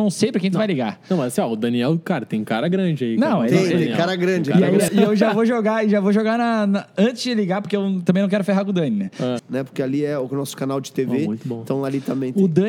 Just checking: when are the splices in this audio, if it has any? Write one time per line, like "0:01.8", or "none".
0:04.9
0:09.4